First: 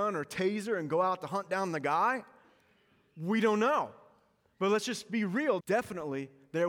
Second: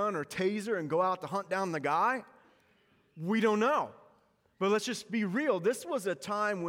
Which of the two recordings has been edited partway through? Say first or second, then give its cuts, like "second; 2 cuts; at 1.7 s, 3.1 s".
first; 1 cut; at 5.6 s